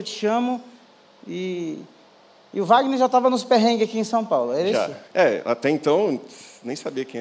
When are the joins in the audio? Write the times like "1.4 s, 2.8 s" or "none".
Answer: 5.1 s